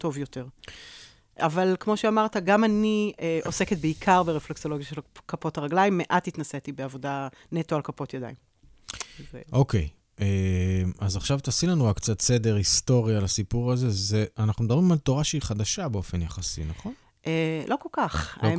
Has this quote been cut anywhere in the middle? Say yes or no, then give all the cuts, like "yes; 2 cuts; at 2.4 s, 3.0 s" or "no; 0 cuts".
no; 0 cuts